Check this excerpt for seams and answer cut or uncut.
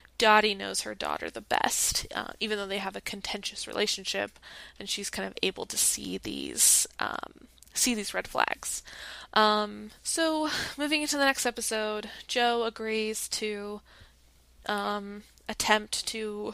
cut